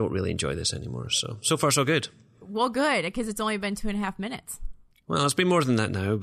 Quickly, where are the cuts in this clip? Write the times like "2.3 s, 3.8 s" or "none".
none